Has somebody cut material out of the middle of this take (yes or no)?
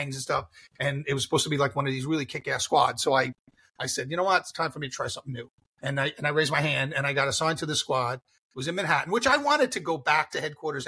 no